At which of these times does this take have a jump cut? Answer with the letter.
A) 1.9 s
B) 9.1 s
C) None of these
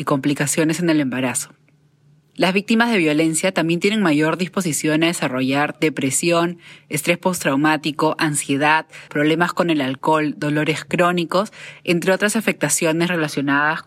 B